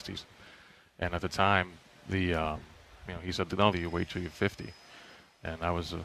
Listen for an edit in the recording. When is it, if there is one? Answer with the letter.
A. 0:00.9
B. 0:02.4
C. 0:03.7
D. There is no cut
C